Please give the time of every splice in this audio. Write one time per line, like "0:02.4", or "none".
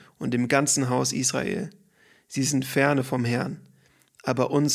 none